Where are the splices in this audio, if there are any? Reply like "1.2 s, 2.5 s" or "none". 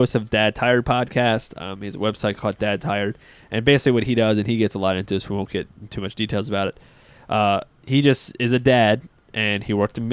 none